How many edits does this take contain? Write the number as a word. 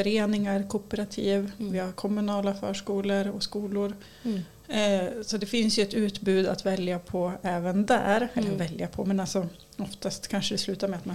zero